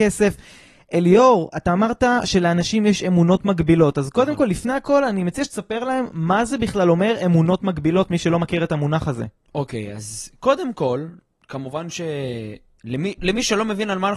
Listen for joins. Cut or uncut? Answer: uncut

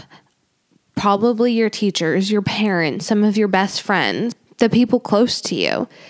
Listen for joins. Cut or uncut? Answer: uncut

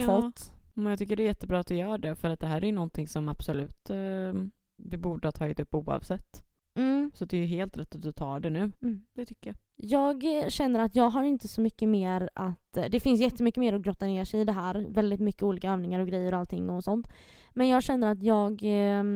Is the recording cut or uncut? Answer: cut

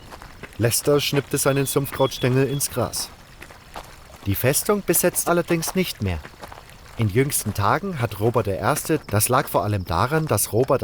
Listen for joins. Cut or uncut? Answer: cut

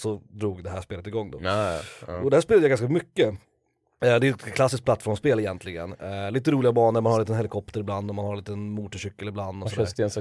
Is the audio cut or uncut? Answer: uncut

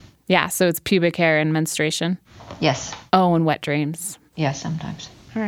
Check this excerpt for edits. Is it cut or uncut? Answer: cut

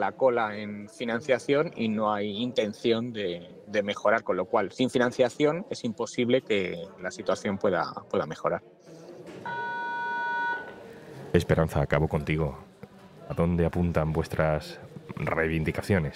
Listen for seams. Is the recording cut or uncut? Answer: cut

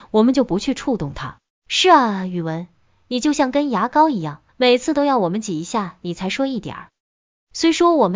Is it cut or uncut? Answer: cut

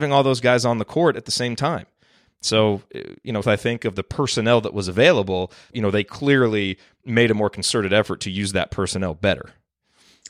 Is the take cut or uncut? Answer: cut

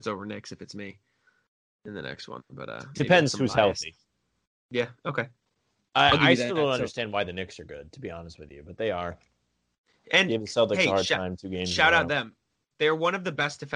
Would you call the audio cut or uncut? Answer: uncut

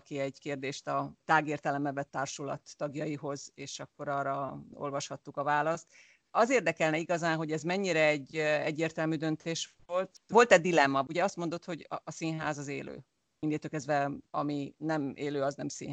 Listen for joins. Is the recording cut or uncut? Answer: cut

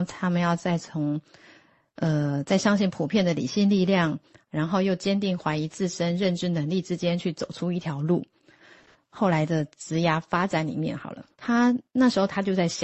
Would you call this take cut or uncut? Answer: cut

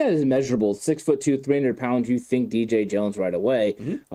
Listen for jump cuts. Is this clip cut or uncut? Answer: uncut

